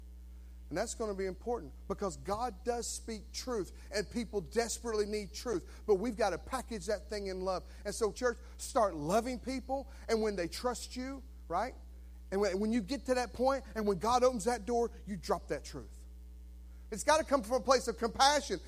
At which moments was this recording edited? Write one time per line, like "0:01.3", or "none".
0:08.1
0:16.9